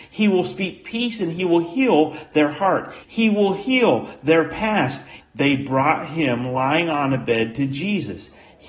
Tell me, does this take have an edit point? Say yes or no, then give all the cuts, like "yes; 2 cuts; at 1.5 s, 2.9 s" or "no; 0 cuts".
yes; 2 cuts; at 3.0 s, 5.2 s